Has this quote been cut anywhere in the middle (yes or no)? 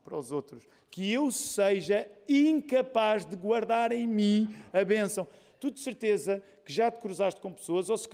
no